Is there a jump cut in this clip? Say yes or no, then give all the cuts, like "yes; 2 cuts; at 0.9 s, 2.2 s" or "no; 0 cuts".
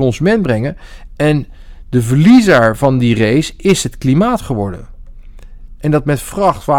yes; 2 cuts; at 1.1 s, 5.8 s